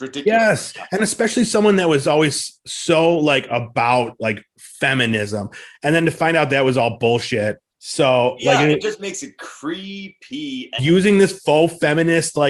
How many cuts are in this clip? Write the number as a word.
two